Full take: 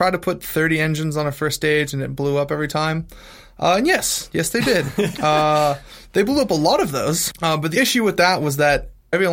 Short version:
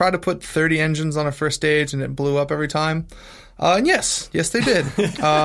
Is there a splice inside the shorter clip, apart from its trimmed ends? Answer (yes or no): no